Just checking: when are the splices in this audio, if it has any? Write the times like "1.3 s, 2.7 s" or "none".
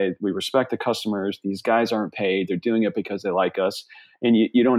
none